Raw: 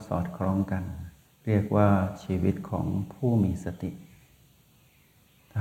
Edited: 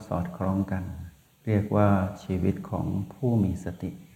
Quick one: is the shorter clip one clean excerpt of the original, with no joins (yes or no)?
yes